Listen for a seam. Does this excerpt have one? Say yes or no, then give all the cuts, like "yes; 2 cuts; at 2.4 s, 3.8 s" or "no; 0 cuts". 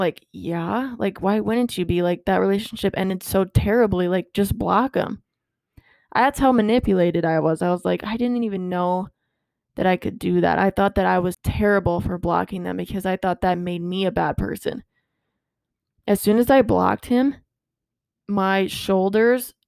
yes; 1 cut; at 11.3 s